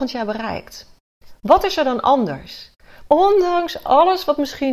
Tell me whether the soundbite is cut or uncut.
cut